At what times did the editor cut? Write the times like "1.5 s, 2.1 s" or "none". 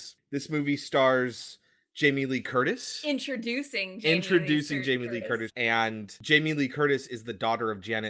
5.5 s